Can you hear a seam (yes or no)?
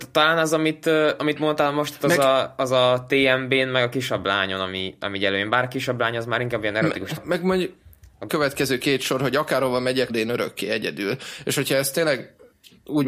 yes